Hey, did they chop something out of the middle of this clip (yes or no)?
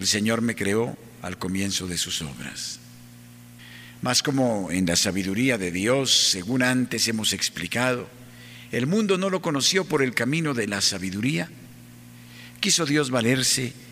no